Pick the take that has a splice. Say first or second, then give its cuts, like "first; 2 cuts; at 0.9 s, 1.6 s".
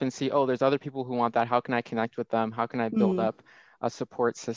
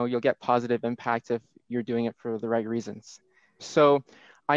second; 1 cut; at 3.6 s